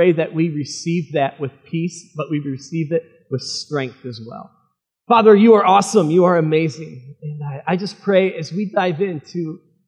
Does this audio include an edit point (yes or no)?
yes